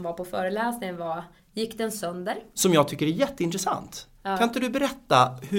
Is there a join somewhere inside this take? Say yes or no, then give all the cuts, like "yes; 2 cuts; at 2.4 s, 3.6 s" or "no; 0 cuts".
yes; 2 cuts; at 1.4 s, 2.5 s